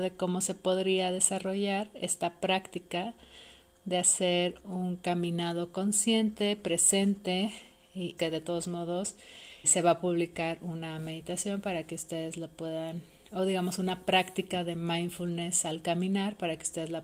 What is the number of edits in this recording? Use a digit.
2